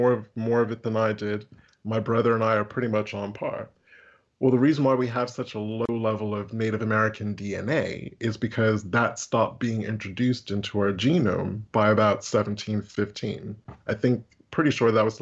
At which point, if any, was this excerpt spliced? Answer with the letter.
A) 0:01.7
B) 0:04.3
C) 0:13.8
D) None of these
D